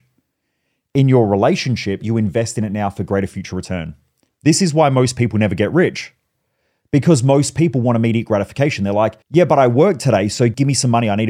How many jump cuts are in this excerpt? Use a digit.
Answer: 3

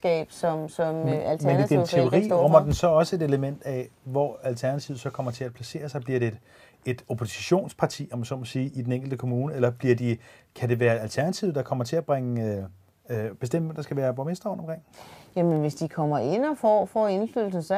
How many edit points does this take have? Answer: 0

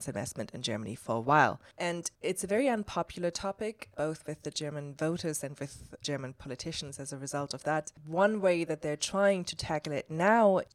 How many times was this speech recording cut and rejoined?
0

